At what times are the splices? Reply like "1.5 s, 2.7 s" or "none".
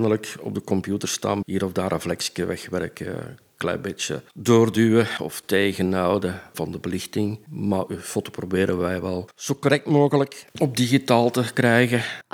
1.4 s